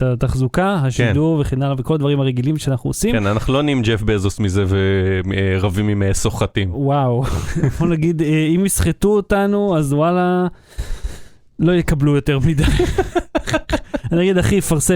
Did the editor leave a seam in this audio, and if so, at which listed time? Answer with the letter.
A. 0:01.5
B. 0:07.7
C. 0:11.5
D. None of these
D